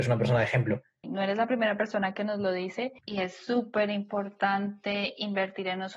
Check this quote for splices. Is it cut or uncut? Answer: cut